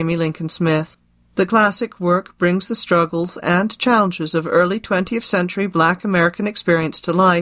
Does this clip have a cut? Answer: no; 0 cuts

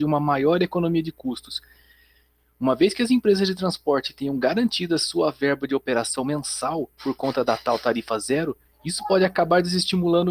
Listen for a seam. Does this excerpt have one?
no; 0 cuts

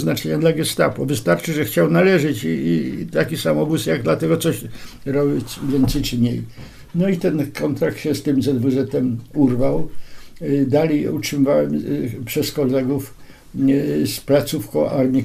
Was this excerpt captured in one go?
yes; 0 cuts

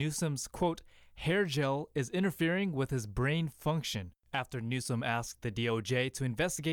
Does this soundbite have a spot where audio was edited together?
no; 0 cuts

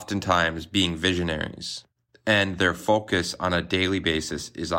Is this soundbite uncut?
yes; 0 cuts

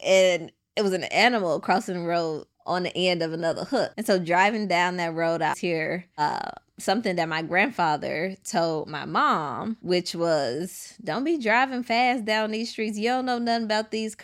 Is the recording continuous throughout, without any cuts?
no; 2 cuts; at 3.9 s, 5.5 s

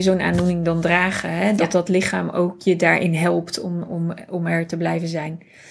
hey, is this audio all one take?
yes; 0 cuts

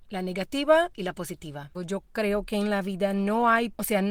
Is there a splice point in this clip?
yes; 1 cut; at 1.7 s

